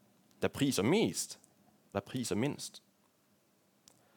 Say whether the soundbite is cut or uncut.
cut